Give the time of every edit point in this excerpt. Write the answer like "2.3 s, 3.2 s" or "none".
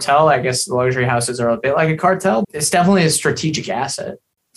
2.4 s